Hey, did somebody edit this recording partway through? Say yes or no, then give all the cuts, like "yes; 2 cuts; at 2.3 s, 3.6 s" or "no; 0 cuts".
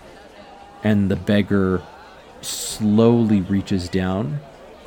no; 0 cuts